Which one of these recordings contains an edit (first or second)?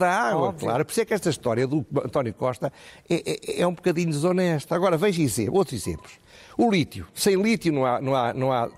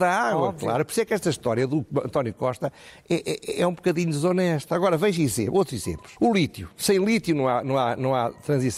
second